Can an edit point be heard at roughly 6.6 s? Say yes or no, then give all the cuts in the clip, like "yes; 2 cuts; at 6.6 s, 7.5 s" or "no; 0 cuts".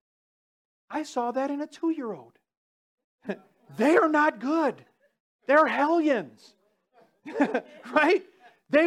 no; 0 cuts